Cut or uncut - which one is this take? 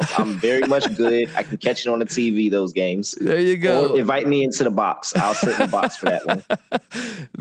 uncut